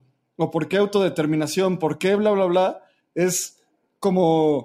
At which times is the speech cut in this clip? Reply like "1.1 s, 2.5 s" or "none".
none